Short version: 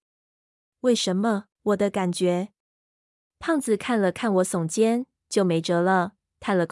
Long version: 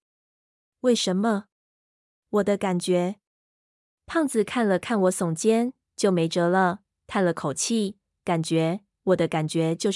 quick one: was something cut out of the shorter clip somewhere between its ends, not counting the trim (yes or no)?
yes